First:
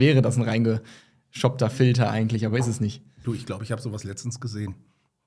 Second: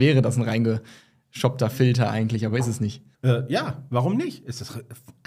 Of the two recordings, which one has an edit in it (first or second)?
second